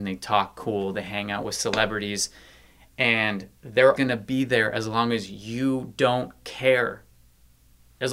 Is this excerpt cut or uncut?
cut